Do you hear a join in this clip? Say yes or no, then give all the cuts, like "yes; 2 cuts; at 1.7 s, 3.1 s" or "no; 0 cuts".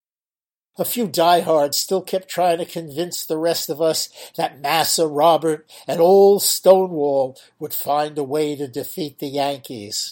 no; 0 cuts